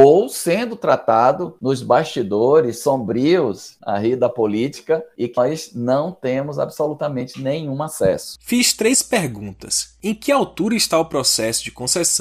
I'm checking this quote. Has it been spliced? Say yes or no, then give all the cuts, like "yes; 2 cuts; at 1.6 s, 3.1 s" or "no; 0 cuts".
yes; 2 cuts; at 5.4 s, 8.4 s